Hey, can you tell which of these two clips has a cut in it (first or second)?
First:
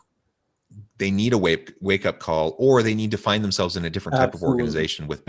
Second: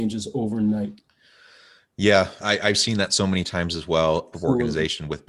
second